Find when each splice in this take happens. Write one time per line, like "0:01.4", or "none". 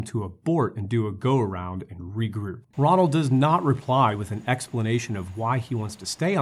0:02.7

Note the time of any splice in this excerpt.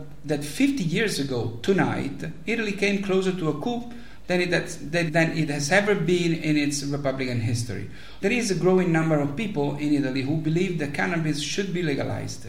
0:05.1
0:08.2

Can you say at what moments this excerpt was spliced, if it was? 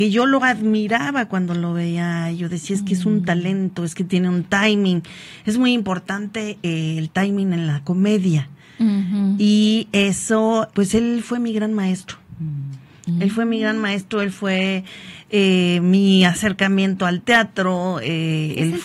0:10.7

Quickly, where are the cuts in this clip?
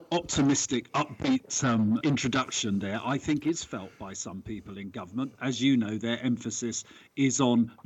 0:02.0
0:05.4

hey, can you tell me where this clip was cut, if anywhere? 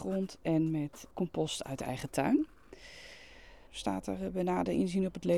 0:01.1
0:03.7

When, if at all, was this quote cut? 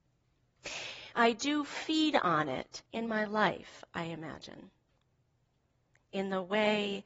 0:01.1
0:02.9

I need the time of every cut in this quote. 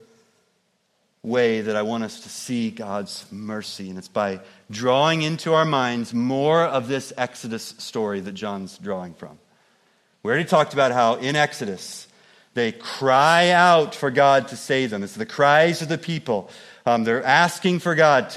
none

